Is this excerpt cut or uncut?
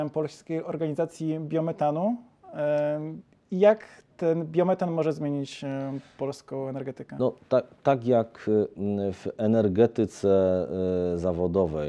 uncut